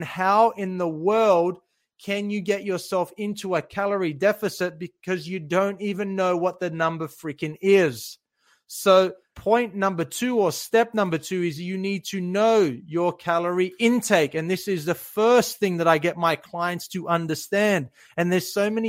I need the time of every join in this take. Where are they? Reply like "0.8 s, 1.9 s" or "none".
none